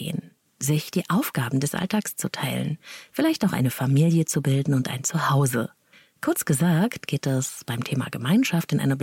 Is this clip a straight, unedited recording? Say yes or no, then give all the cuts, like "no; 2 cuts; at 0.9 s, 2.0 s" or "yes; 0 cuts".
no; 1 cut; at 3.1 s